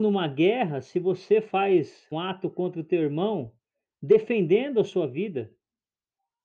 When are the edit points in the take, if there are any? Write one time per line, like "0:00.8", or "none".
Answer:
0:02.1